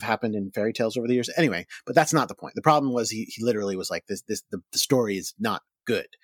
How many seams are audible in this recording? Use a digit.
0